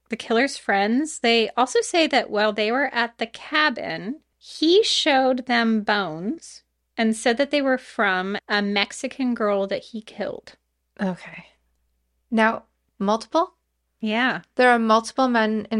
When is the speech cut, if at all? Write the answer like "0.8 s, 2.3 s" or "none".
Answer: 8.4 s, 12.9 s